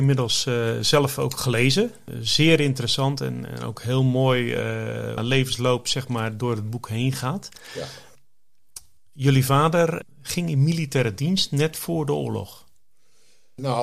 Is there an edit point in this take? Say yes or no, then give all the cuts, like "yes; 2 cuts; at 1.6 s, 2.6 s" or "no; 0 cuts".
yes; 1 cut; at 5.2 s